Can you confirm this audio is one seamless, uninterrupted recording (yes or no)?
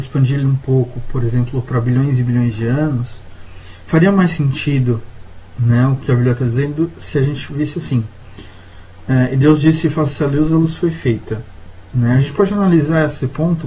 yes